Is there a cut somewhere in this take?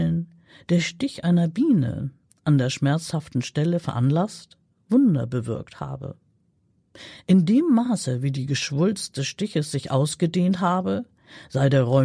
no; 0 cuts

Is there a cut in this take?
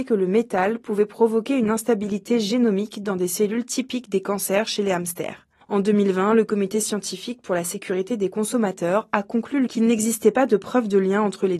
yes; 1 cut; at 9.7 s

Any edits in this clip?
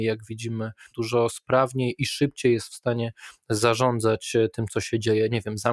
yes; 1 cut; at 0.9 s

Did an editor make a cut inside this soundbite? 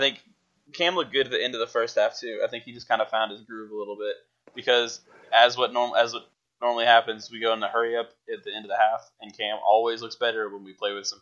no; 0 cuts

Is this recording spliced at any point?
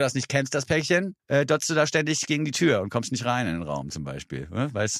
yes; 1 cut; at 1.2 s

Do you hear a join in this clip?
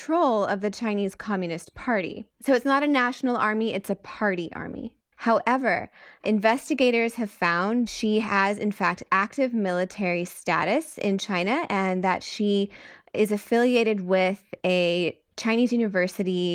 yes; 1 cut; at 5.1 s

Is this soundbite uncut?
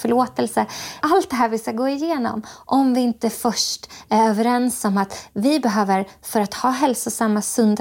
no; 1 cut; at 1.0 s

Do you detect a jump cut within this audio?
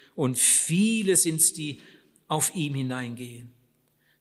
no; 0 cuts

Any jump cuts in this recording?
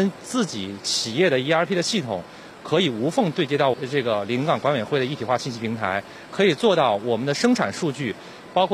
no; 0 cuts

